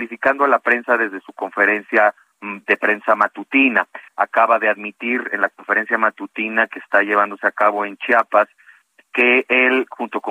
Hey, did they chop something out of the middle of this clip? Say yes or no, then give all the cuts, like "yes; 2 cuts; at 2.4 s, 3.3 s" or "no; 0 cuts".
yes; 1 cut; at 4.1 s